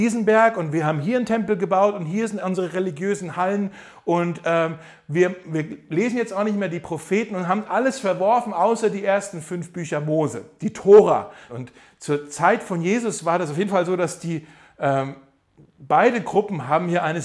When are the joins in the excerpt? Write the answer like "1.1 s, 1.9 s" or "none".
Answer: 7.7 s, 11.5 s

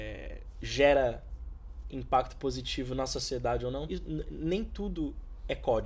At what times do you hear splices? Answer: 3.9 s

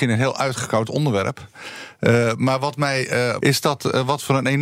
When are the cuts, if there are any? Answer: 3.4 s

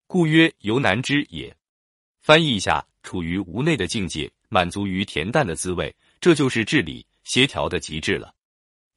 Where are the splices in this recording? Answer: 2.9 s, 4.4 s

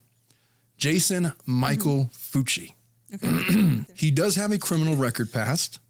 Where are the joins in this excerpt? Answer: 3.9 s

